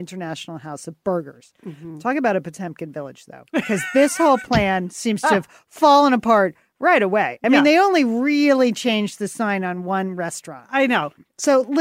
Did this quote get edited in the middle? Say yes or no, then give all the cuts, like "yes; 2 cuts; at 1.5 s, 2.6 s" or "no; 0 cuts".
no; 0 cuts